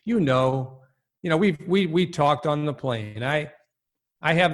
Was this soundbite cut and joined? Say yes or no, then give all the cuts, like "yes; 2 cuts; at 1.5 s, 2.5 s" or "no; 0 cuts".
no; 0 cuts